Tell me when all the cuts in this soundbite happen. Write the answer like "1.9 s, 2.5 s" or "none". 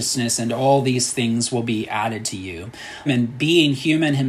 3.1 s